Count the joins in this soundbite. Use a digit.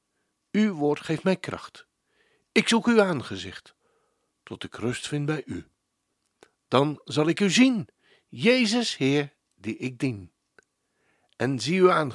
0